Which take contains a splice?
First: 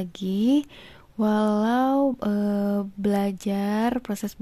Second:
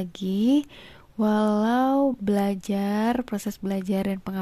second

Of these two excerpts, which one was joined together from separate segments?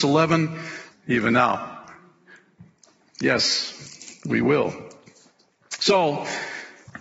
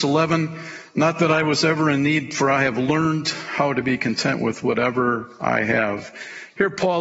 first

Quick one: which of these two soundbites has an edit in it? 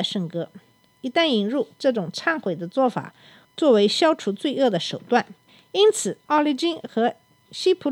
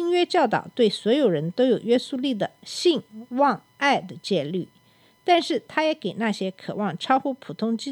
first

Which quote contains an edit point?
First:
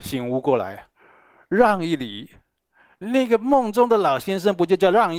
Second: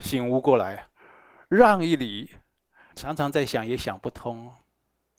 second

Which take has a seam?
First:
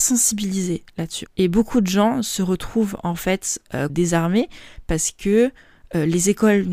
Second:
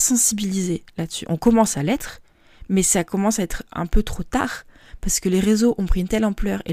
first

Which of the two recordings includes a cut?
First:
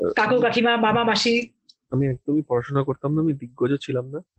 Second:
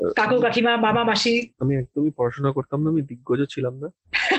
second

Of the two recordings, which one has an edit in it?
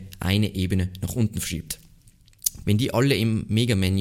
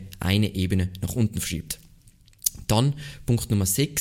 first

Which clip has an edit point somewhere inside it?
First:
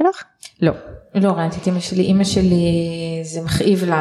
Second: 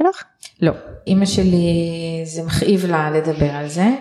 second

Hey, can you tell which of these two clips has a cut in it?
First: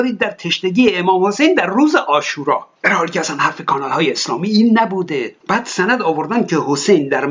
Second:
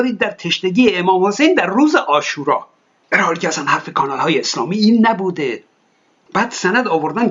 first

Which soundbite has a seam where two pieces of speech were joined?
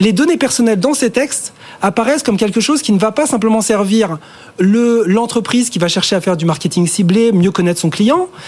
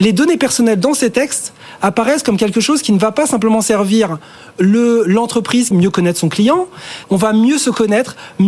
second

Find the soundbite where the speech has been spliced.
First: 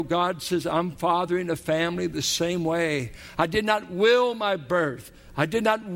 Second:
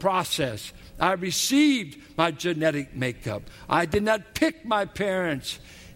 first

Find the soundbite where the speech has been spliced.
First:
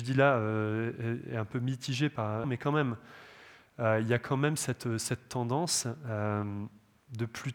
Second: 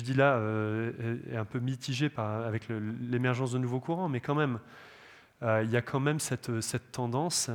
first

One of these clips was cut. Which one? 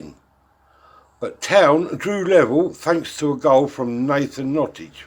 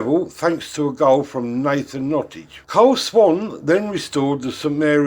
second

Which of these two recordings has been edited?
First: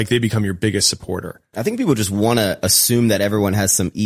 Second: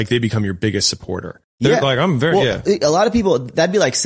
second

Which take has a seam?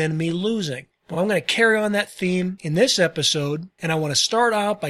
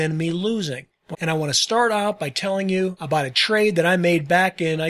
second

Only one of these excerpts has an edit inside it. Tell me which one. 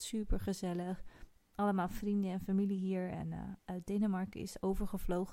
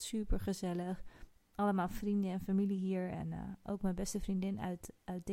first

